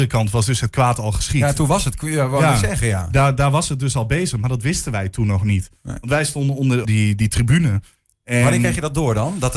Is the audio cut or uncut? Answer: cut